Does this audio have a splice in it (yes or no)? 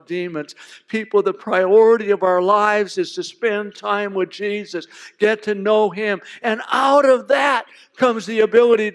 no